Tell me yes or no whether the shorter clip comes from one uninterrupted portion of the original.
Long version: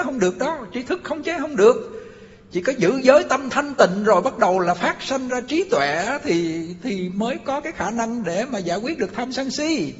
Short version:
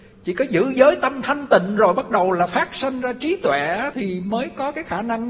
no